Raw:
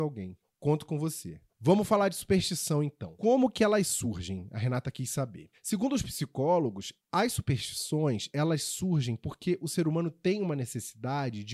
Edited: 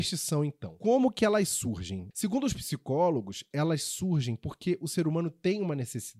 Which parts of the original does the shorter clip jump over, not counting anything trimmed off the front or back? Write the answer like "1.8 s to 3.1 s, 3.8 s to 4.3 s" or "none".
4.5 s to 5.6 s, 7.0 s to 8.3 s